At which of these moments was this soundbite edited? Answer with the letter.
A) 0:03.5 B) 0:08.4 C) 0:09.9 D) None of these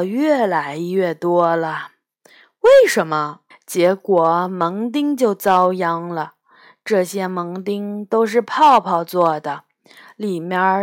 A